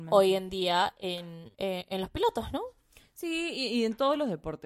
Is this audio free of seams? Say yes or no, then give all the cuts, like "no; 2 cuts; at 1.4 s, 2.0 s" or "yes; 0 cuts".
no; 1 cut; at 1.5 s